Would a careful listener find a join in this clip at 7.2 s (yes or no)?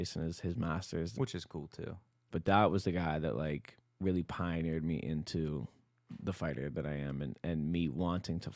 no